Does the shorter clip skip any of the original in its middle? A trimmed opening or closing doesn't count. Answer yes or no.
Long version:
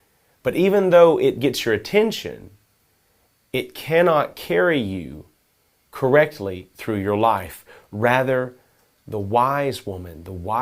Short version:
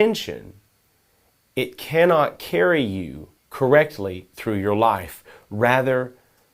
yes